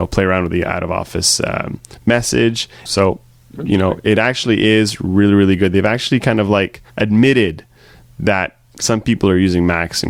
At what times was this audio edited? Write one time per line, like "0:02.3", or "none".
0:02.9
0:06.9